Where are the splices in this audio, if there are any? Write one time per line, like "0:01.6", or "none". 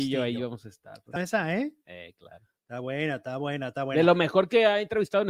0:01.2